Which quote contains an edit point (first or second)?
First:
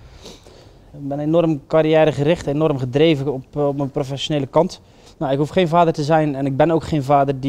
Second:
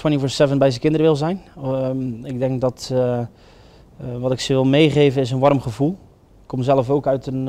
first